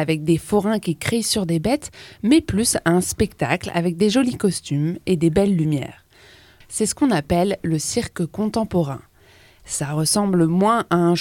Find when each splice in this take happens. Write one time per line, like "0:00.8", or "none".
0:06.6